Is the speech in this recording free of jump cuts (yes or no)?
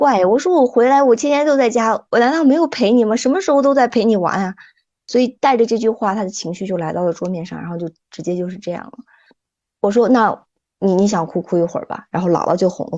yes